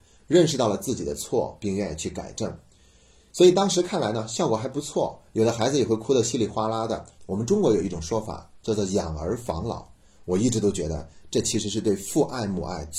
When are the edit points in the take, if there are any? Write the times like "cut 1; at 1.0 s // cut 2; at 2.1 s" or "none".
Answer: cut 1; at 7.2 s